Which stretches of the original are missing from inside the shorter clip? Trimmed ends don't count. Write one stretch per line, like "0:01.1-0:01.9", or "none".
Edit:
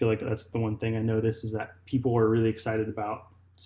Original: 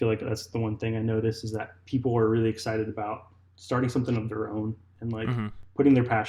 none

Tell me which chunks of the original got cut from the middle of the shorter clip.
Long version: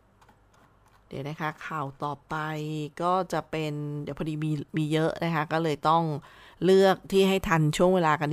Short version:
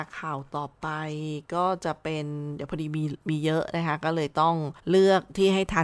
0:06.3-0:06.5

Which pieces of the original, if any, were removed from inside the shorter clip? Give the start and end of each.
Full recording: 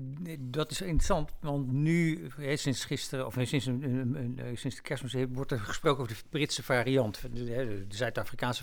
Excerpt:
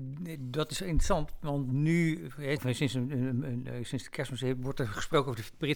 0:02.6-0:03.3

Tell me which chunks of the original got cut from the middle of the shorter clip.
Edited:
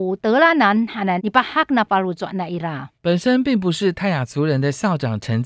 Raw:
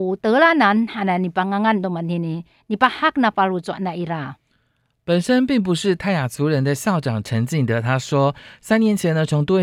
0:01.2-0:02.6
0:04.4-0:05.0

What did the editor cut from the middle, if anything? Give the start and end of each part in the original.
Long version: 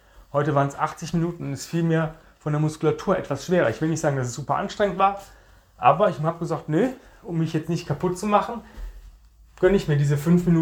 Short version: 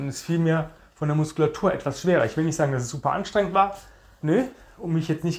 0:05.7-0:06.7

